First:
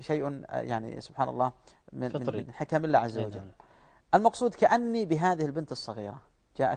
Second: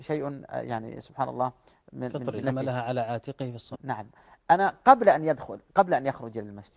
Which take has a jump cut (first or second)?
second